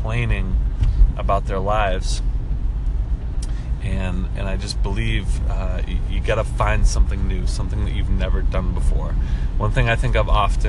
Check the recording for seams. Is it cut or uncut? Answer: uncut